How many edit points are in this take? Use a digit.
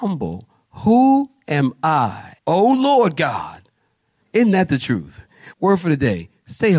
3